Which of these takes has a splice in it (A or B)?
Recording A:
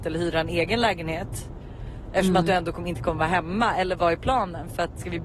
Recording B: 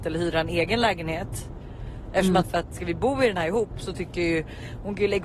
B